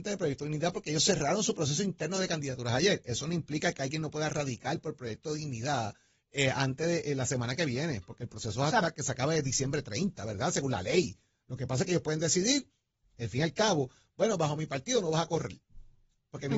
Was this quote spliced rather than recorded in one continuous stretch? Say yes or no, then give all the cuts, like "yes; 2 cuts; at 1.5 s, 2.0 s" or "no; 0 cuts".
no; 0 cuts